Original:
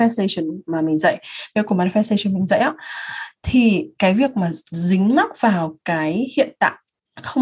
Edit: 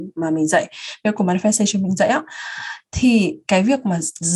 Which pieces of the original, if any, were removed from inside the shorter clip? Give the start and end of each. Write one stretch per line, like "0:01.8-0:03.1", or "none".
none